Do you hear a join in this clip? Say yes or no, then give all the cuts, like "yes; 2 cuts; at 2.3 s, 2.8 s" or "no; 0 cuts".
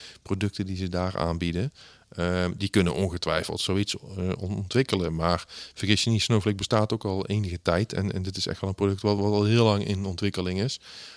yes; 1 cut; at 9.2 s